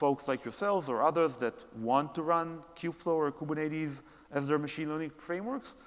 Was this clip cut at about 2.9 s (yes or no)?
no